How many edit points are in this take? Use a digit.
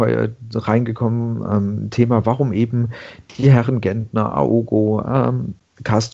0